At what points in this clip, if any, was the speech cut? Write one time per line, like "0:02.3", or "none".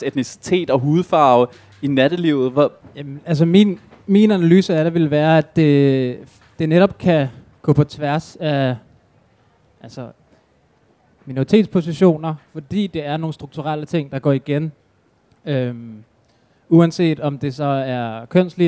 0:02.8